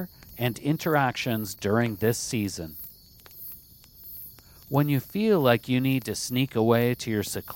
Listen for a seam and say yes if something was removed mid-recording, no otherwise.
no